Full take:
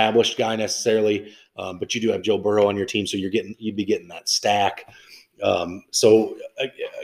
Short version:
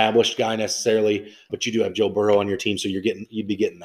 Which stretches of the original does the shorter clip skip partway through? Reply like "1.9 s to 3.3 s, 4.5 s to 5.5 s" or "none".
1.5 s to 1.8 s